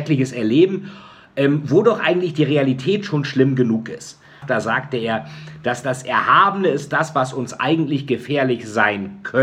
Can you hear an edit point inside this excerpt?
yes; 1 cut; at 4.4 s

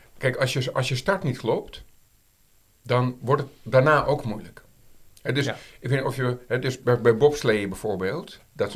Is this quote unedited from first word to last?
yes; 0 cuts

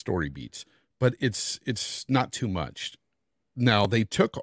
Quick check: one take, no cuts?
yes; 0 cuts

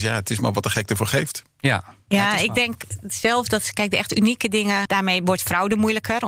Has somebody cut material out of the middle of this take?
yes; 1 cut; at 4.9 s

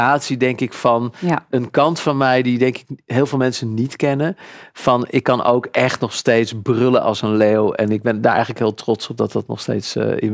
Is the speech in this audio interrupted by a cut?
no; 0 cuts

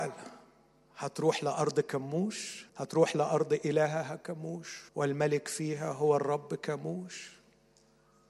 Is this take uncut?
no; 2 cuts; at 2.7 s, 4.9 s

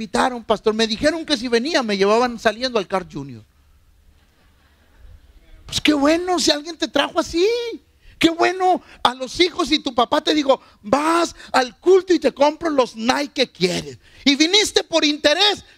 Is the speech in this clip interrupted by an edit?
no; 0 cuts

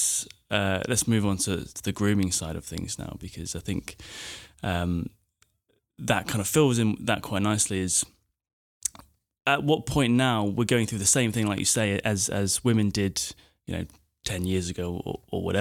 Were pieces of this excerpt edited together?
no; 0 cuts

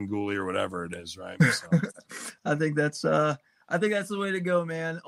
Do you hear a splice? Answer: no; 0 cuts

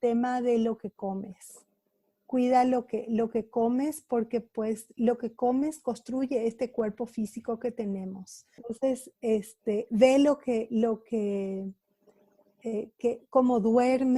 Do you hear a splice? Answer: yes; 1 cut; at 8.6 s

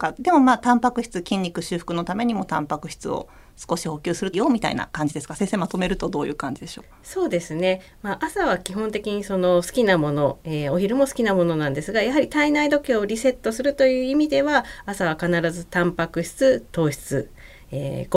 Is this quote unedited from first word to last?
no; 1 cut; at 4.3 s

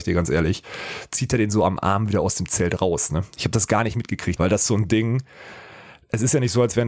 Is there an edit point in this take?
yes; 1 cut; at 4.4 s

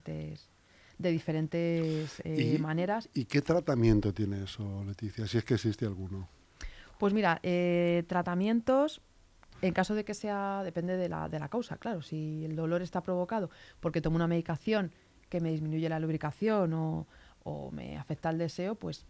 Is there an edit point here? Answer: no; 0 cuts

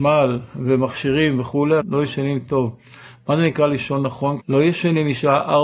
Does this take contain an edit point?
yes; 2 cuts; at 1.8 s, 4.4 s

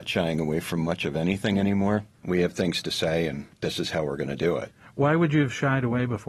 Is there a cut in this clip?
yes; 1 cut; at 2.1 s

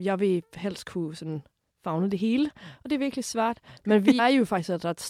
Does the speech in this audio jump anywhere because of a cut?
yes; 1 cut; at 4.2 s

